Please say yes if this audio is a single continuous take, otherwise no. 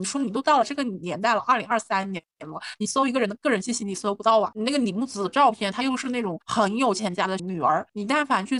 yes